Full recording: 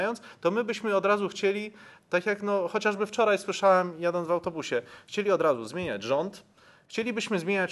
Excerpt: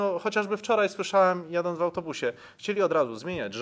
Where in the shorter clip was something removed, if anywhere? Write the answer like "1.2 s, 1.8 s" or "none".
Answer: none